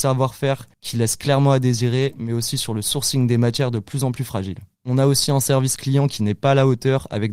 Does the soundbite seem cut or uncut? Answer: cut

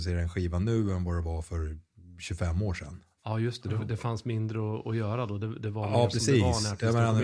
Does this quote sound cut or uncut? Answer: uncut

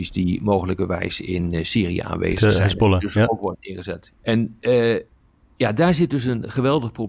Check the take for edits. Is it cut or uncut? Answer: cut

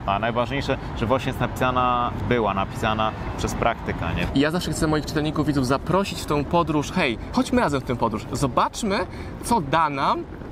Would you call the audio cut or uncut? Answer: cut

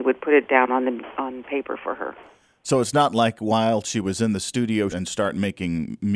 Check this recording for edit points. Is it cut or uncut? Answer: cut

